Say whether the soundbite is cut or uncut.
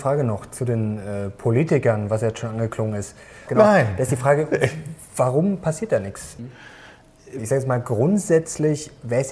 cut